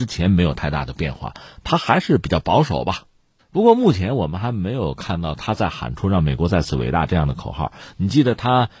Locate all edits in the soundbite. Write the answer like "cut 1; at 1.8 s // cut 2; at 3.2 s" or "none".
cut 1; at 3.4 s